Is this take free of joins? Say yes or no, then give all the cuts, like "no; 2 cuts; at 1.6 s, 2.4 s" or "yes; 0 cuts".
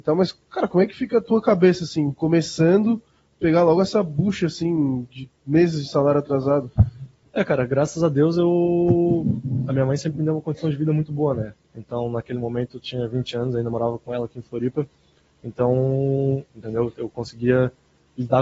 no; 2 cuts; at 11.6 s, 16.5 s